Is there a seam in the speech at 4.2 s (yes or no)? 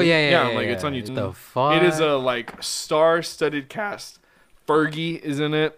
no